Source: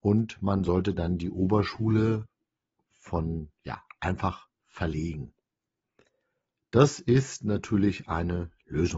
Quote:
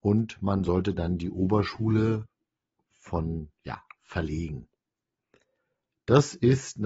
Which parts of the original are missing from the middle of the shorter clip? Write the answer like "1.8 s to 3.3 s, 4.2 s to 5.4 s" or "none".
3.9 s to 4.6 s